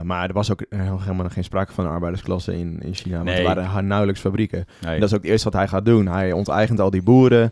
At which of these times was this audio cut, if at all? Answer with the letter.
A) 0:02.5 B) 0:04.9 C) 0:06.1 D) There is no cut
D